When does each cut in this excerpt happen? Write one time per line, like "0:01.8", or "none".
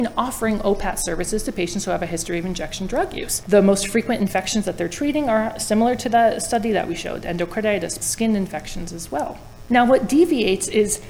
0:03.4
0:08.0